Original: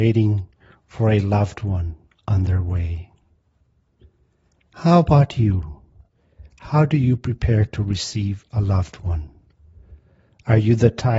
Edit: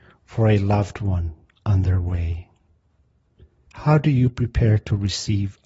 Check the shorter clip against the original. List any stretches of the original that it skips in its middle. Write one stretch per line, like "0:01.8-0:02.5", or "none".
0:04.3-0:06.5